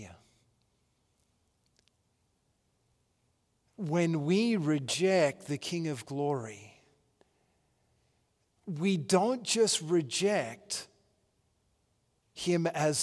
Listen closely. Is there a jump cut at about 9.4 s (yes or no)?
no